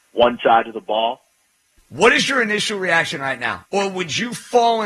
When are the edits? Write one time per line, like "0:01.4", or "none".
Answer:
0:01.8
0:03.7

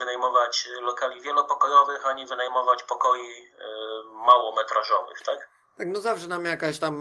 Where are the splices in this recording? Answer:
none

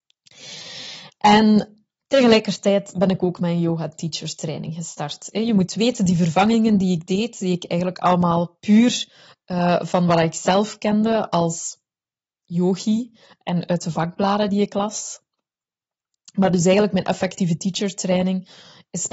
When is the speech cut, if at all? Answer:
none

